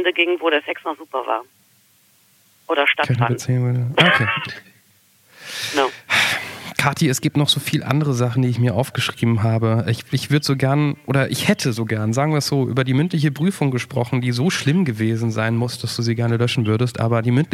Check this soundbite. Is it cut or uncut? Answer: uncut